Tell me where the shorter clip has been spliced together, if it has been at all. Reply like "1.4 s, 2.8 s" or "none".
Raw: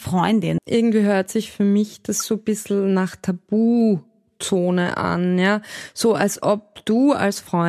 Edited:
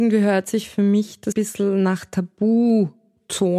1.3 s